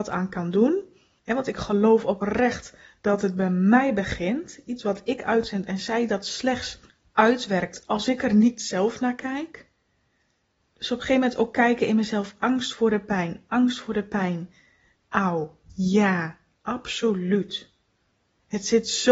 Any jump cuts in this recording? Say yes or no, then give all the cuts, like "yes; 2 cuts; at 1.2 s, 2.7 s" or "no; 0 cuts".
yes; 1 cut; at 14.9 s